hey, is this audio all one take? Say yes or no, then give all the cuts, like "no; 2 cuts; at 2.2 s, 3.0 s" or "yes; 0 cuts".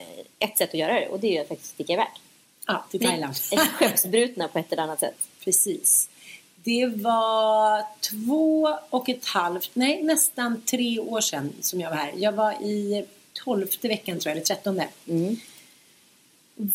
yes; 0 cuts